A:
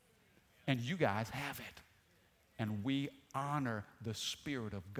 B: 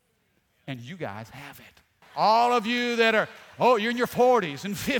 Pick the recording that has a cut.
B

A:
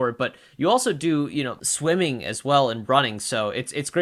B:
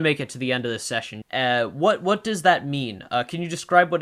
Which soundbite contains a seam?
B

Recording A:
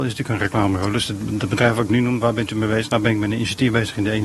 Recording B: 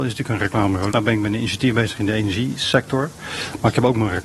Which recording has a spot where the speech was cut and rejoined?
B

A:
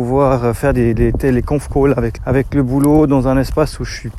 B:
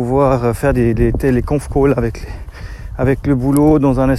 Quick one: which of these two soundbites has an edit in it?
A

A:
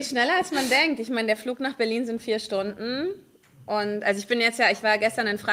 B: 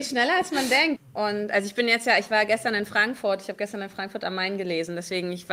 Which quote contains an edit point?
B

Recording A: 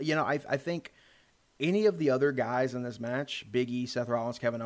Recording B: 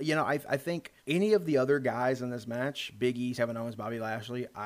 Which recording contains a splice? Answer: B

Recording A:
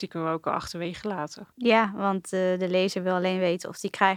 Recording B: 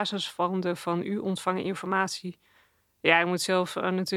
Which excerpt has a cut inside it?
A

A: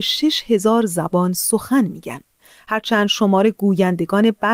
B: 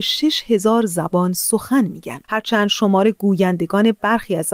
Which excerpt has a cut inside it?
B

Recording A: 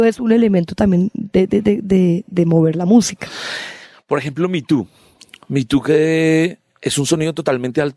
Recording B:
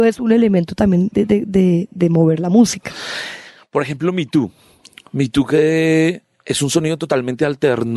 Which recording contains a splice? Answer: B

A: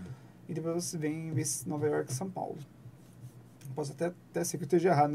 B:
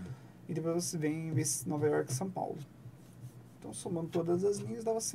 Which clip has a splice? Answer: B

